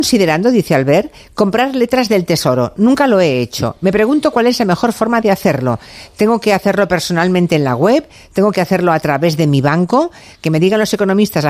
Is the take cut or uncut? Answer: uncut